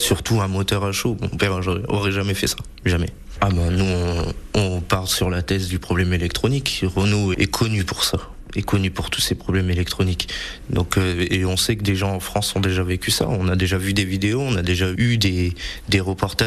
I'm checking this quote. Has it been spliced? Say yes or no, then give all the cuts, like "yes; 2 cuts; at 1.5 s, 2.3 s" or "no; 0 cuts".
yes; 1 cut; at 7.3 s